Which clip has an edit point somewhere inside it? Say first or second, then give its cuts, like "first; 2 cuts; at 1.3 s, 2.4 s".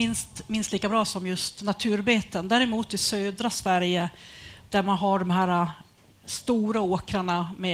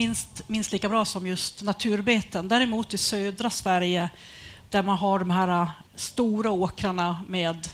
second; 1 cut; at 5.9 s